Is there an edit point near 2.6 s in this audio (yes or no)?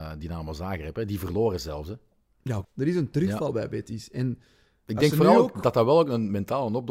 yes